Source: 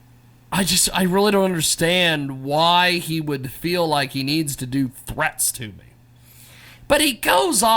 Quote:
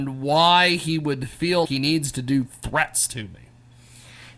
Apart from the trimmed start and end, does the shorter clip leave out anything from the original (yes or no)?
yes